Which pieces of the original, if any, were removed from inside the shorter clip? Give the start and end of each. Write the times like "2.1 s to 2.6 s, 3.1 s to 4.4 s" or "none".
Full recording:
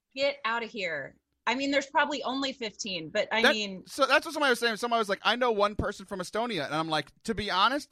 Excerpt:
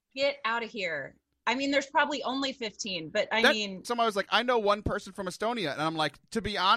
3.8 s to 4.8 s